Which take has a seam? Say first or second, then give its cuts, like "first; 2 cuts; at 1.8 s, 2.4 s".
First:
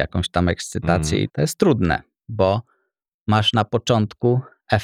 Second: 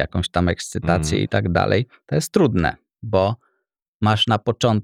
first; 1 cut; at 1.3 s